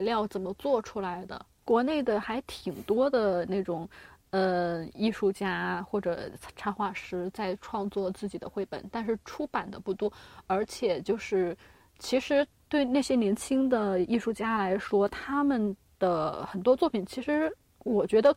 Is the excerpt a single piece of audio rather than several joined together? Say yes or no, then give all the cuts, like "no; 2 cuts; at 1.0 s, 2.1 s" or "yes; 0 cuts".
yes; 0 cuts